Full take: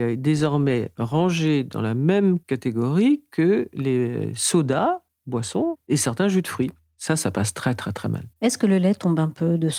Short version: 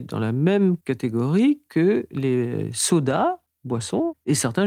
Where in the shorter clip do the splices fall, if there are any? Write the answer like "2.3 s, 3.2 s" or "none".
none